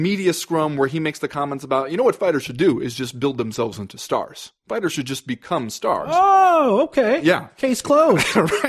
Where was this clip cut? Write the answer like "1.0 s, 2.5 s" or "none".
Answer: none